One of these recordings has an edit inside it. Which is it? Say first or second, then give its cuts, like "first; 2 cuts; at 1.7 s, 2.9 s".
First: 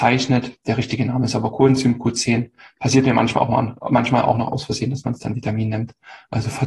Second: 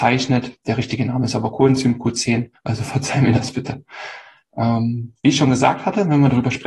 second; 1 cut; at 2.5 s